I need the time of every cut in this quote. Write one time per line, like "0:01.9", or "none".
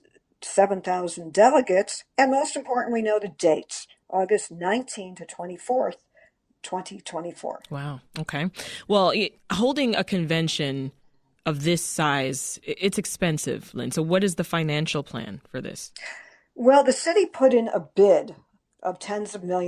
none